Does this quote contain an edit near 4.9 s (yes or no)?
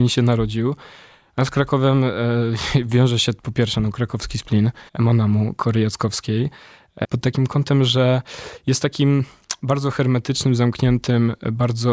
yes